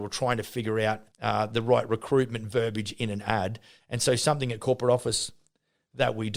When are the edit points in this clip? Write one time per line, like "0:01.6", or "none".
0:01.1

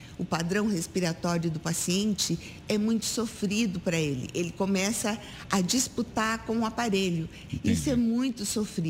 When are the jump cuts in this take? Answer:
0:07.5

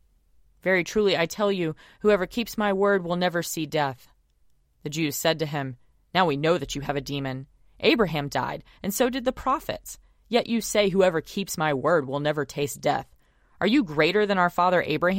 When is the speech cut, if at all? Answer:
none

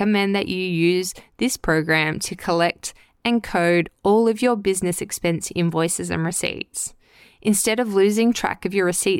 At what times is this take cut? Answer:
none

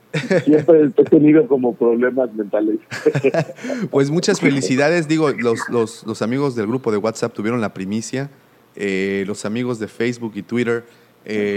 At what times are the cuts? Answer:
none

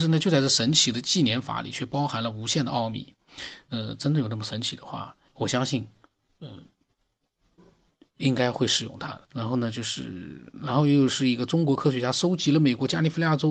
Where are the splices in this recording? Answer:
0:05.3
0:09.2

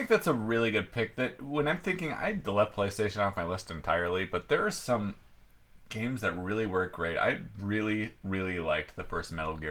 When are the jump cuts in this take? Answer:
none

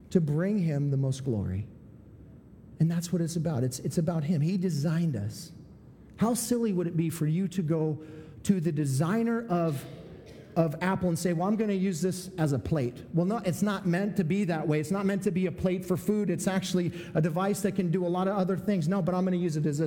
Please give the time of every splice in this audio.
none

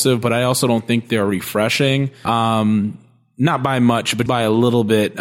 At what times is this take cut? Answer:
0:02.2
0:04.3

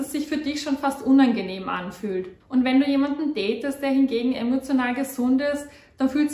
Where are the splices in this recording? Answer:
0:02.4

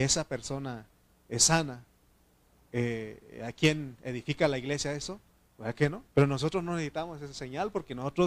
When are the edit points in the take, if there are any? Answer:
0:06.1

